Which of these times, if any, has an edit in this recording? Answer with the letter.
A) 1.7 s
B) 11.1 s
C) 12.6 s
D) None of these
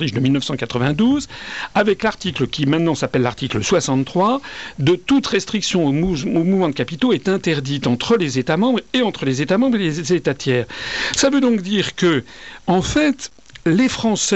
D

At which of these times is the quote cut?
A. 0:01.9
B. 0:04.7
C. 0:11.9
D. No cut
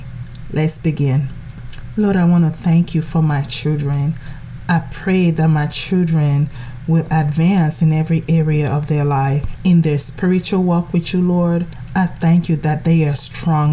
D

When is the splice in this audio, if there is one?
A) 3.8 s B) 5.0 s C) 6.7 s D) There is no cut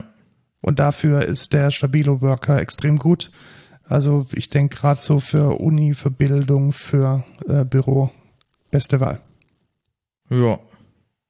D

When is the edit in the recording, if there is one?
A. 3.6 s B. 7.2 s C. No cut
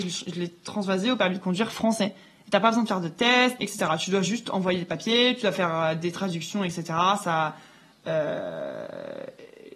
A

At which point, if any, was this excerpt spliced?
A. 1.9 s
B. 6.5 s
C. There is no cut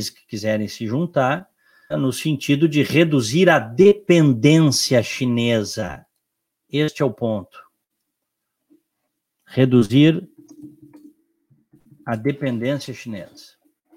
A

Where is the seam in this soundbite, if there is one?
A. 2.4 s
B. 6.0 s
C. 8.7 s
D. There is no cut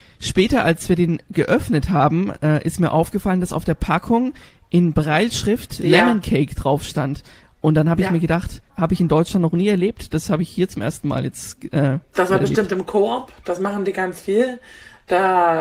C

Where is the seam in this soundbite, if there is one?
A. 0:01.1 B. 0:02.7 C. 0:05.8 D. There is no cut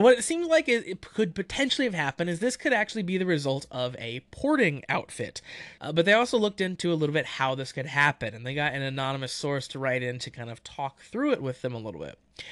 C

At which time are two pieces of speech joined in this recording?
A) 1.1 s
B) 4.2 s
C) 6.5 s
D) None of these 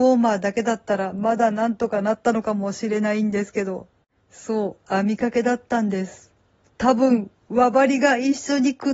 D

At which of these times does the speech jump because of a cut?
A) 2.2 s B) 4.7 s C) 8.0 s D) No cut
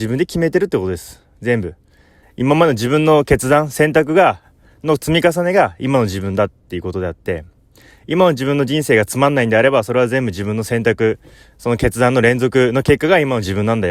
A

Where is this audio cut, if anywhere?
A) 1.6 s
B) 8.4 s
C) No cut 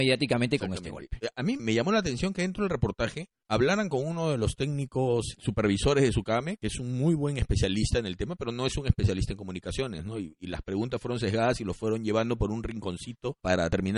A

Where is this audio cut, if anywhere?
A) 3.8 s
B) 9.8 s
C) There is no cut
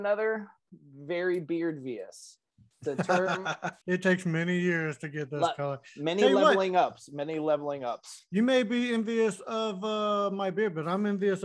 A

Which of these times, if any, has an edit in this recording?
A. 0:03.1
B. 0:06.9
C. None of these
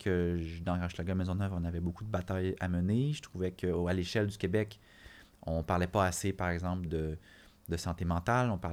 B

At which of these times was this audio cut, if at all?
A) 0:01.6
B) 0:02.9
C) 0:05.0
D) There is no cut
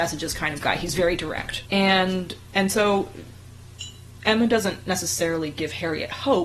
A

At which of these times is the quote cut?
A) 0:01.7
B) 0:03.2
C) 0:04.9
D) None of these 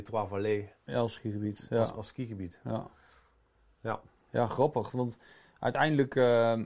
D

